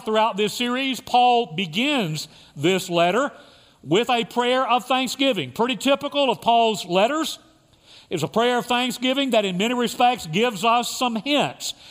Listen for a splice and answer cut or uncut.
uncut